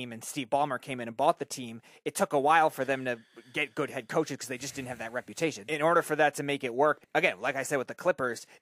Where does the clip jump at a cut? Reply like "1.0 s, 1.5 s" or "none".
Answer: 5.7 s, 7.0 s

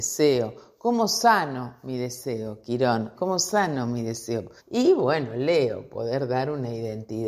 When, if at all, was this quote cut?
3.1 s, 4.6 s

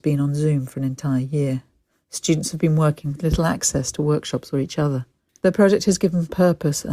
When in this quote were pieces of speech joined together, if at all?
5.3 s

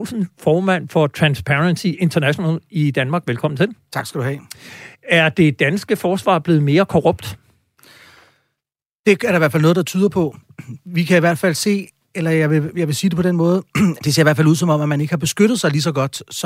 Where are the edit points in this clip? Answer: 14.0 s

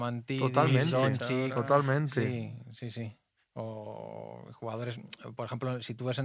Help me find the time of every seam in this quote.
none

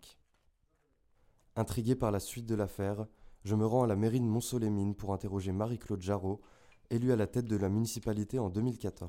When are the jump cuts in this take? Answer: none

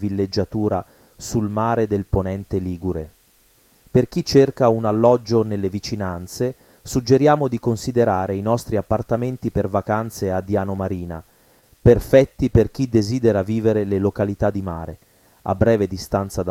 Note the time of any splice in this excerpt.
none

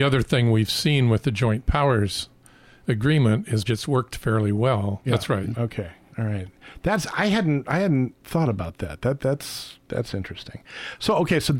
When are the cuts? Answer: 3.6 s, 5.0 s

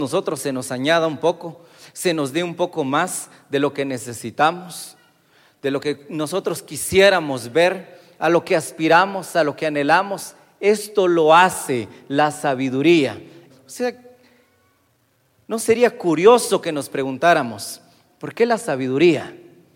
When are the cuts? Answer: 13.5 s

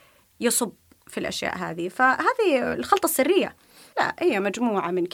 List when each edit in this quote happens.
3.9 s

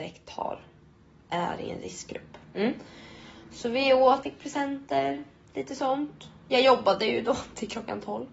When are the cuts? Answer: 4.2 s

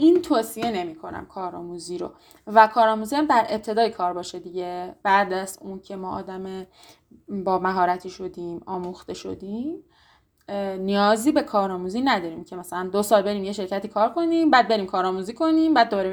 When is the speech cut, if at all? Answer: 5.0 s

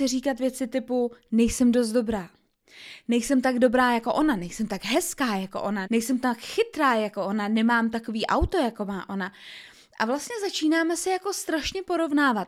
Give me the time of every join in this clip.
5.8 s

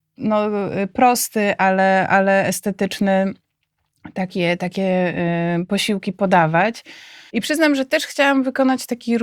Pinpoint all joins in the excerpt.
7.3 s

